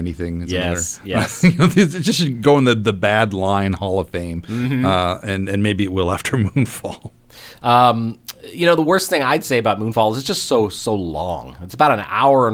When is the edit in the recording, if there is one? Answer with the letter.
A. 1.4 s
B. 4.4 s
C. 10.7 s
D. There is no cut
D